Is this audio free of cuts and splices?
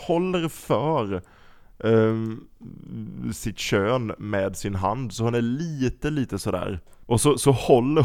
no; 1 cut; at 7.0 s

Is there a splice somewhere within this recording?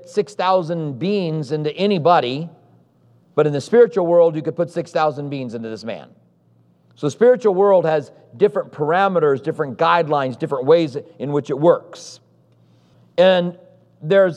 no; 0 cuts

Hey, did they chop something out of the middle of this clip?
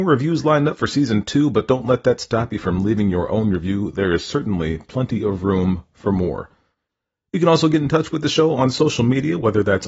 no; 0 cuts

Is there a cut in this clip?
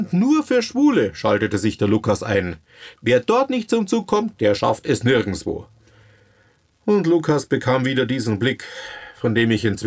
yes; 1 cut; at 2.9 s

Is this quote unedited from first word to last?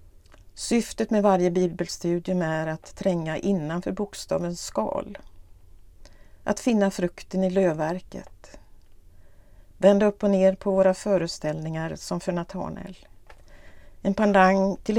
no; 1 cut; at 9.7 s

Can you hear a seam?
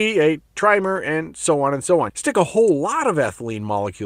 yes; 1 cut; at 2.1 s

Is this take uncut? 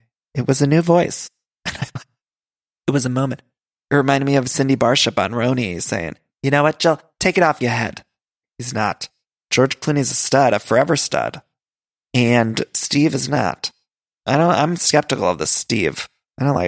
no; 1 cut; at 8.4 s

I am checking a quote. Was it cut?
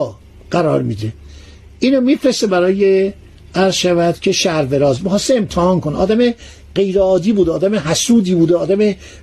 no; 0 cuts

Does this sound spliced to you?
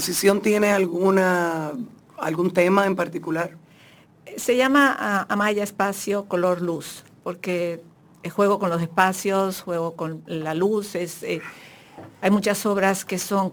no; 0 cuts

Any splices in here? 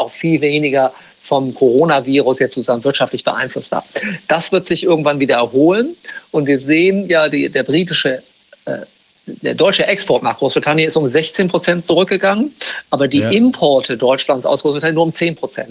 no; 0 cuts

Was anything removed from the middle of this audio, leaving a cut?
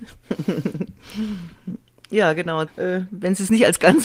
yes; 1 cut; at 2.7 s

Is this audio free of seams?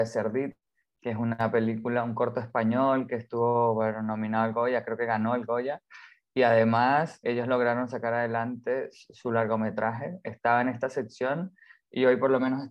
no; 1 cut; at 7.2 s

